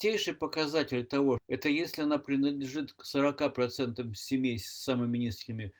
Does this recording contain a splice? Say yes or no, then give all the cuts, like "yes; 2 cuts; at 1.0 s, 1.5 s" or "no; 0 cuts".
yes; 1 cut; at 1.4 s